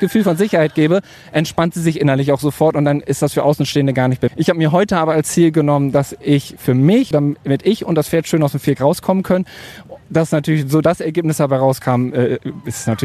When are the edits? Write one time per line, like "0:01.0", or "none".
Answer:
0:04.3
0:07.1